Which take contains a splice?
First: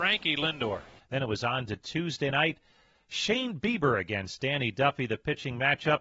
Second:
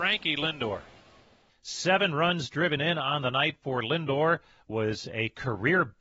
first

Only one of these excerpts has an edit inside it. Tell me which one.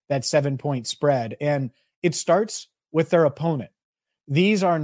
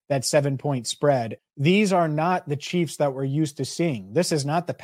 second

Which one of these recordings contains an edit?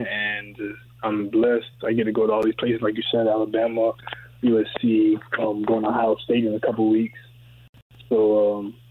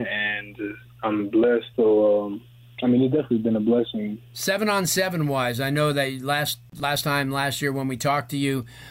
second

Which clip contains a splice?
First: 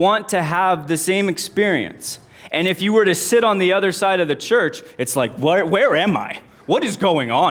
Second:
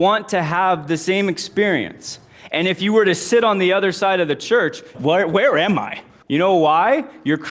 second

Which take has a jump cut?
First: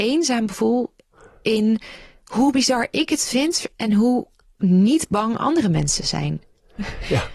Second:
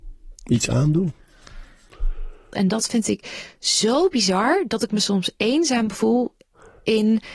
second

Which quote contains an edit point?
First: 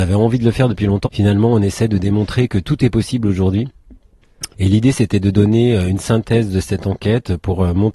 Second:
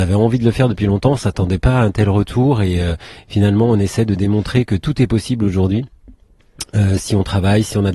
first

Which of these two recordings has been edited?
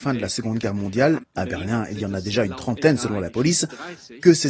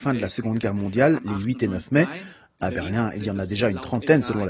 first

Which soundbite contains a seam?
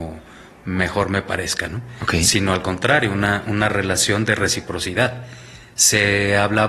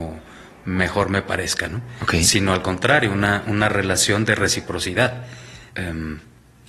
second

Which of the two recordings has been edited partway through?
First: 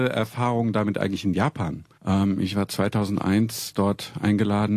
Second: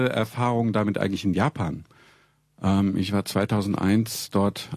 first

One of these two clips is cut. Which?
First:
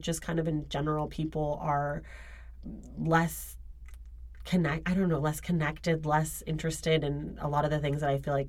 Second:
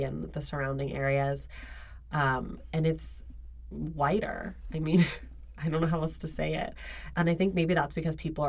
second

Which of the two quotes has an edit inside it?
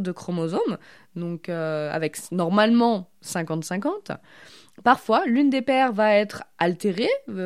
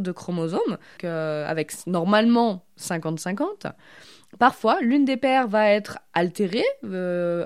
second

